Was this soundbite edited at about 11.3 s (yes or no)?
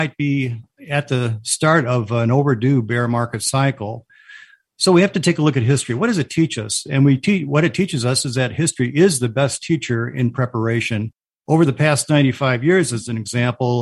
no